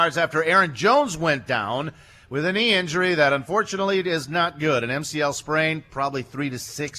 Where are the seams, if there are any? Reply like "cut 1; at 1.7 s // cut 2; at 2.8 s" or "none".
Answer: none